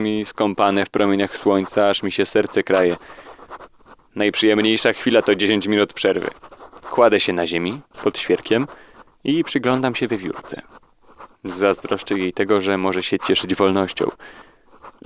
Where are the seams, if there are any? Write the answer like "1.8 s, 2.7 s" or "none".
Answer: none